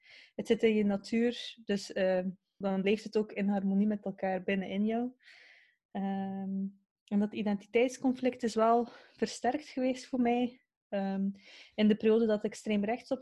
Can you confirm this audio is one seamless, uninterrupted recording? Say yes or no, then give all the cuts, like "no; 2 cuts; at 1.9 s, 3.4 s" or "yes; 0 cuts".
no; 1 cut; at 2.6 s